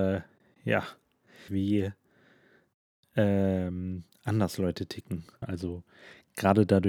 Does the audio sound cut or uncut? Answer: cut